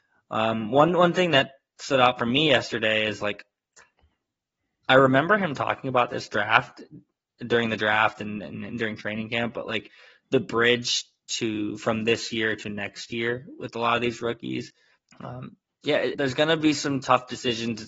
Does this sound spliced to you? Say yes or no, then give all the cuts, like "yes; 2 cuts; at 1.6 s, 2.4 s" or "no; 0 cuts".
yes; 2 cuts; at 15.1 s, 16.1 s